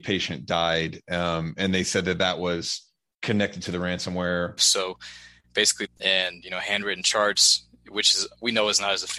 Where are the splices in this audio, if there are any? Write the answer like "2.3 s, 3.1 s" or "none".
4.6 s, 5.9 s

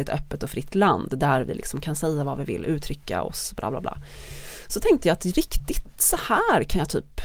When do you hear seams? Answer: none

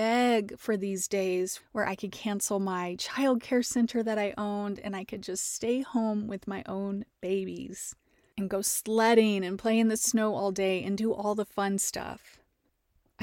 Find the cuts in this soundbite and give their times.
1.6 s

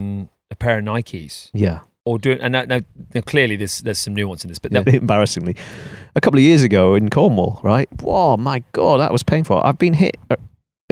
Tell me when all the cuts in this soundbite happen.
4.9 s

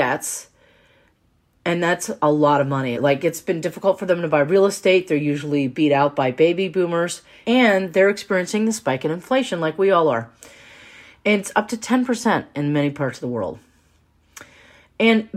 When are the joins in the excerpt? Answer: 2.9 s

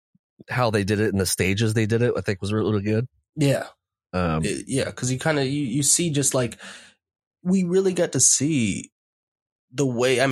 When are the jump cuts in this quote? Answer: none

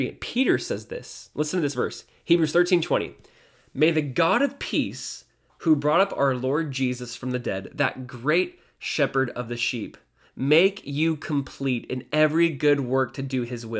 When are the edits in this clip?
10.2 s

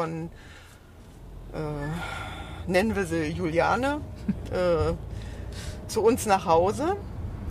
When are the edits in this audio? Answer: none

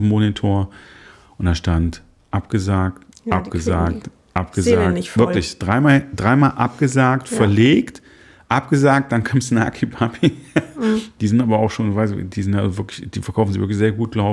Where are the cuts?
none

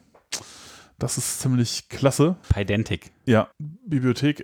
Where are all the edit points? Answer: 2.4 s, 3.5 s

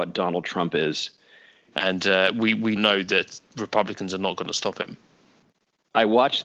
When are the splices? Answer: 1.7 s, 2.8 s

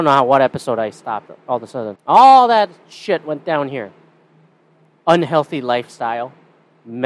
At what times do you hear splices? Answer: 2.0 s

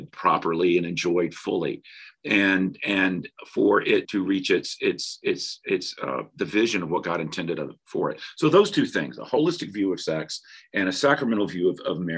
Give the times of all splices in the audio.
4.0 s

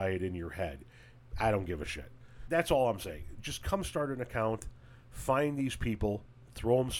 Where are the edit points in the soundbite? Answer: 2.5 s

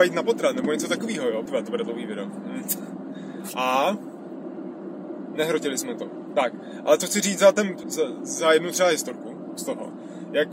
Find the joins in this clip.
1.5 s, 7.8 s

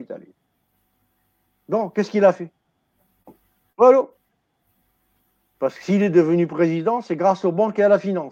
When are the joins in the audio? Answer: none

